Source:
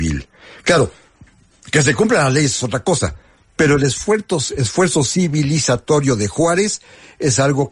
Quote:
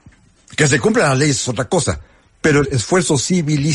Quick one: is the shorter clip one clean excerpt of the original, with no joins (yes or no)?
no